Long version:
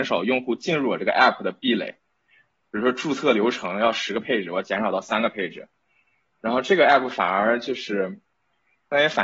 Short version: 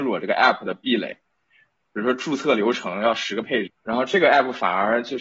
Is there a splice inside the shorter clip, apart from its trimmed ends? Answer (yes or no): yes